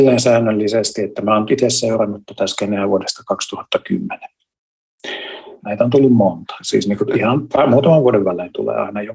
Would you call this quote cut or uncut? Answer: cut